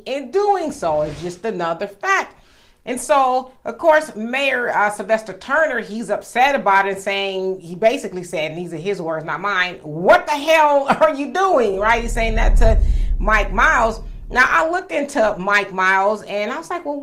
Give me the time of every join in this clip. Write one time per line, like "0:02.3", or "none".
none